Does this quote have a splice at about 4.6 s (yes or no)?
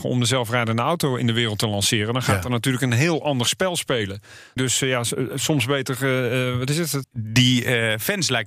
yes